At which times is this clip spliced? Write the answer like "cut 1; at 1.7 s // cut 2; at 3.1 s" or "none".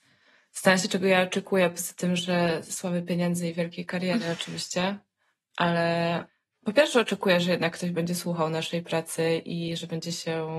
none